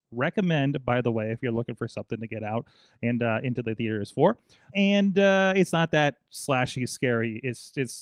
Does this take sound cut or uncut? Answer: cut